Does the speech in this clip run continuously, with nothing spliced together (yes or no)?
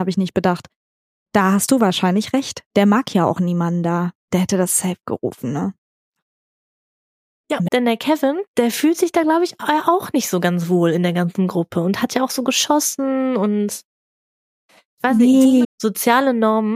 no